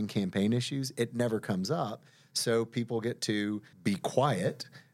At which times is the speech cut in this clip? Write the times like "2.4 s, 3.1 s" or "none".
3.7 s